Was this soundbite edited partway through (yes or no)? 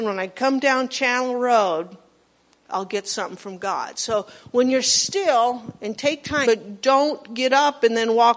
yes